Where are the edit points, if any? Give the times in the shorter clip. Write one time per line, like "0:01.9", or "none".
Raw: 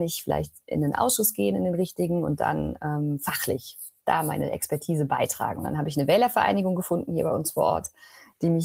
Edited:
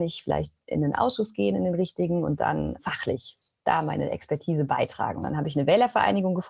0:02.8